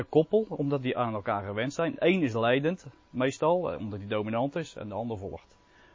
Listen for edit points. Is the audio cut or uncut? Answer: uncut